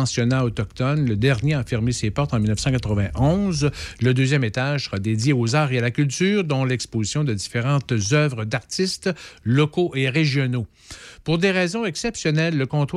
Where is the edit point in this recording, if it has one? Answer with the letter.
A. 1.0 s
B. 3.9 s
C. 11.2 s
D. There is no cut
B